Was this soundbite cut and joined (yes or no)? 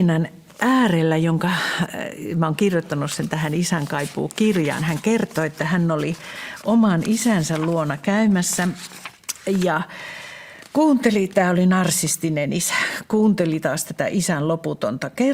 no